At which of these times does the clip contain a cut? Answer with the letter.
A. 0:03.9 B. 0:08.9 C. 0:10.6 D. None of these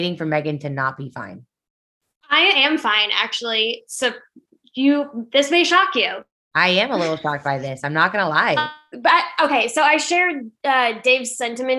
B